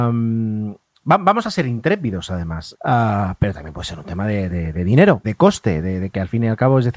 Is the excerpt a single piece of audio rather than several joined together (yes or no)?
no